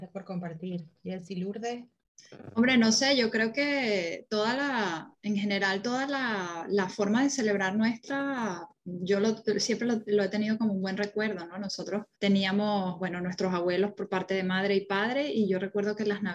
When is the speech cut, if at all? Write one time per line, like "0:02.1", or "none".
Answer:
0:12.1